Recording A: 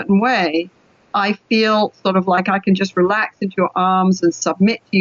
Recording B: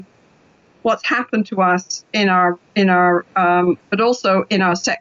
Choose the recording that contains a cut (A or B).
B